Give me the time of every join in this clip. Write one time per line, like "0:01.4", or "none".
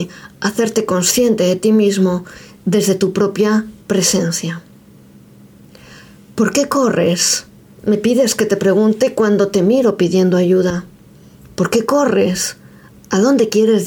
none